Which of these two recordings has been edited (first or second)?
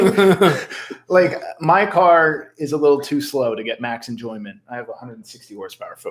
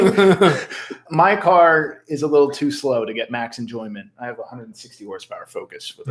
second